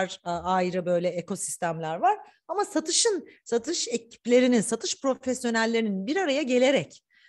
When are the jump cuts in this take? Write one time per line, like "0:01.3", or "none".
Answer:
none